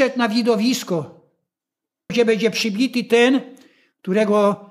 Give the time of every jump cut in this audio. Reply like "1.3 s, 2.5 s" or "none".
2.1 s